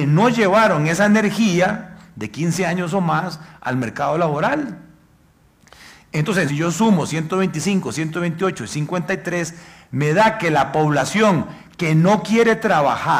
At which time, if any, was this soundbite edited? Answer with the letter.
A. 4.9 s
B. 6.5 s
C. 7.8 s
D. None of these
B